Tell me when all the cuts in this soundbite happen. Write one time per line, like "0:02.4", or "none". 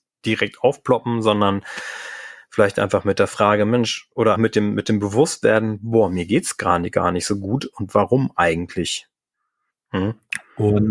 0:04.3
0:09.7